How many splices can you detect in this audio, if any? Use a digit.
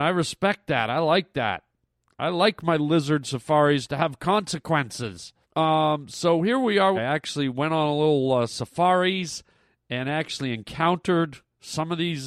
2